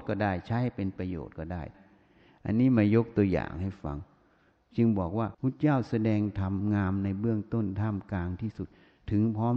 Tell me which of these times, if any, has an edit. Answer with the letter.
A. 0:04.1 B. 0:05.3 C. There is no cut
B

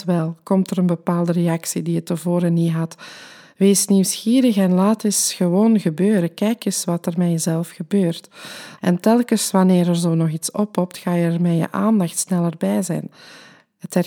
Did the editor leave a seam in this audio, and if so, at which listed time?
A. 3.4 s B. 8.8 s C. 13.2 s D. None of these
B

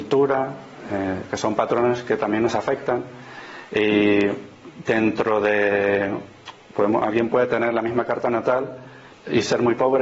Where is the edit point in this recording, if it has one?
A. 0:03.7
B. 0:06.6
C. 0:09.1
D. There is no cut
C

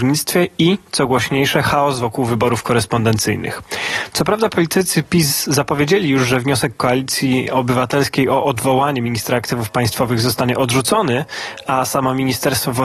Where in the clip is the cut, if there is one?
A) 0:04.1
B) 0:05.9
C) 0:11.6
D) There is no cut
D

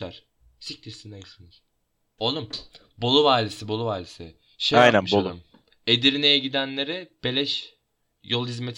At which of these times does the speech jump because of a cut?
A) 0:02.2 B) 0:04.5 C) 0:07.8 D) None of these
A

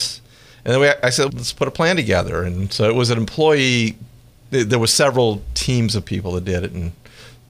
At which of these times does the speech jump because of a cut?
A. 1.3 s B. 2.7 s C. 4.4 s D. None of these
A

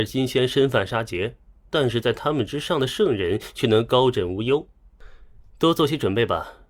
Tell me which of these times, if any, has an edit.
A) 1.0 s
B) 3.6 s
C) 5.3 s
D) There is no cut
D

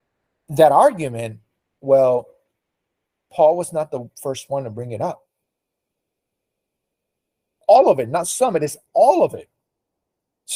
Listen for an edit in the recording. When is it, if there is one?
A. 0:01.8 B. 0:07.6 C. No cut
B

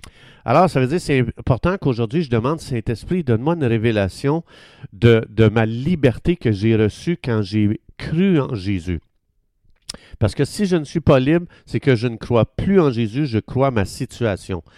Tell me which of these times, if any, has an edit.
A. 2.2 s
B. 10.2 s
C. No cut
C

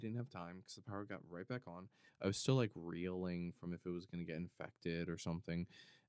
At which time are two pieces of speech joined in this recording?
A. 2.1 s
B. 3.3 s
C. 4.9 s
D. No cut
A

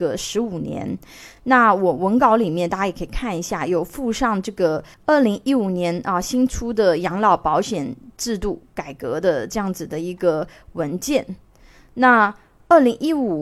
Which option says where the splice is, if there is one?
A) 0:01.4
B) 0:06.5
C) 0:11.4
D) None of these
D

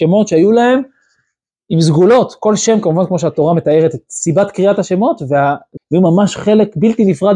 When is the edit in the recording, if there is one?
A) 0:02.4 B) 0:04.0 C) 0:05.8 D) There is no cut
C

